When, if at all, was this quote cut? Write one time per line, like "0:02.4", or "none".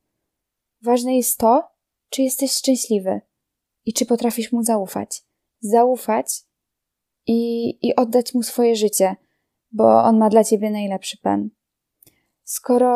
none